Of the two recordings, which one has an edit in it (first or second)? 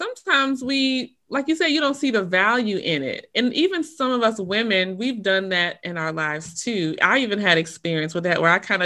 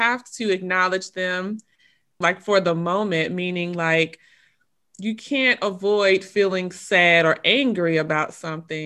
second